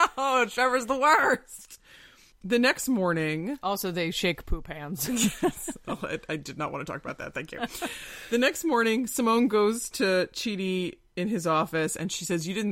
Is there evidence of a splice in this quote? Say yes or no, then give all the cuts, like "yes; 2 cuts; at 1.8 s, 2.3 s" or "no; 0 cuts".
no; 0 cuts